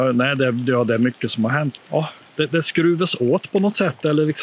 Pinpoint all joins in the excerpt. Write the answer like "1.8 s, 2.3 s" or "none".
1.8 s